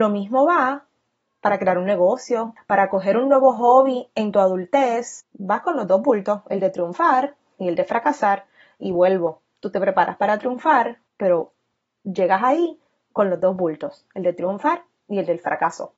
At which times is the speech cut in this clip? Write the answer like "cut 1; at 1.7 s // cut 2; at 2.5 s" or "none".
cut 1; at 2.6 s // cut 2; at 11.1 s